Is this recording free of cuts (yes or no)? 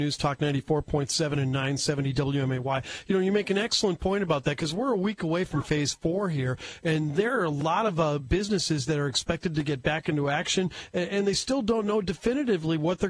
yes